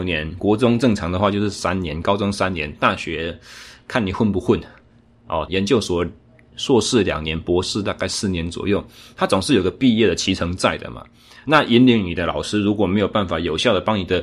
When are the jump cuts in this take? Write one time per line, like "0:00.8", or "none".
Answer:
0:05.5